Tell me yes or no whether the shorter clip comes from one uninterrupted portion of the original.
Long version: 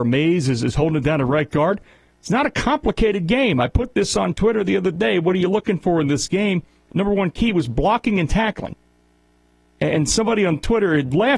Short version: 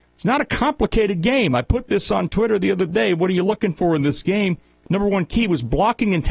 yes